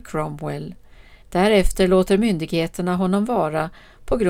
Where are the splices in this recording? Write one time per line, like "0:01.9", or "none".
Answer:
0:01.2